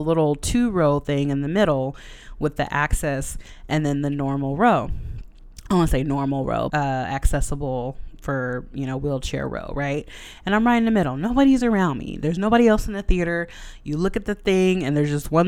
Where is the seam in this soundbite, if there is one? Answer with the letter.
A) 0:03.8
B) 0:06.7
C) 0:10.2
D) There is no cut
B